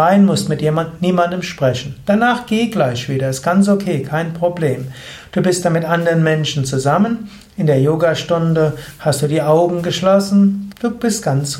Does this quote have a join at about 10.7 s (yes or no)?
yes